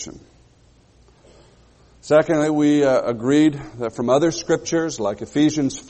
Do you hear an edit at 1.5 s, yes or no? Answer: no